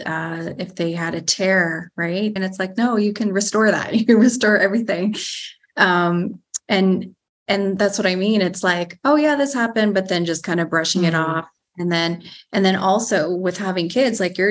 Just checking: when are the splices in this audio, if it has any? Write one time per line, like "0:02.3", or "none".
0:02.4